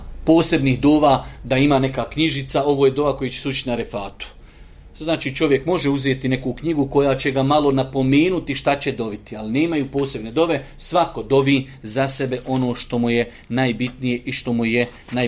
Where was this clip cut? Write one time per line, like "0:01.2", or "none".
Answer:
none